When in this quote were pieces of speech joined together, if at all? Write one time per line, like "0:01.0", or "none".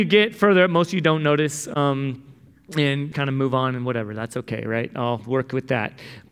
0:03.1